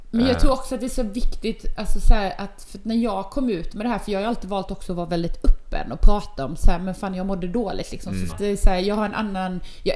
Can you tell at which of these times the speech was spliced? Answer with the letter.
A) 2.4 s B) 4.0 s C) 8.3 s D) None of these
C